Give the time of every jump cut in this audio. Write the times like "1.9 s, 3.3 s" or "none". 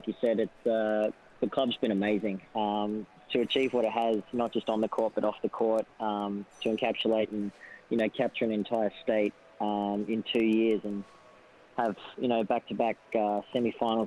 none